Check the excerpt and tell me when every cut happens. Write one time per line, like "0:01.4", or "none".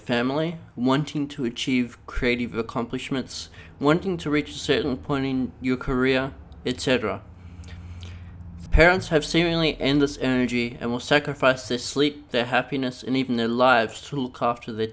0:08.7
0:12.3